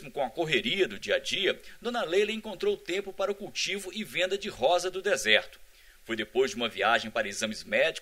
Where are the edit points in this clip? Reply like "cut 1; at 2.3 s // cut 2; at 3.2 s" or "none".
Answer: none